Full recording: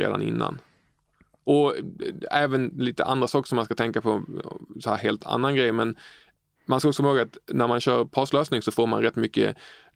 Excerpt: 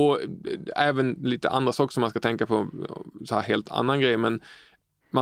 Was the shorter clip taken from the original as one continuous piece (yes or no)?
yes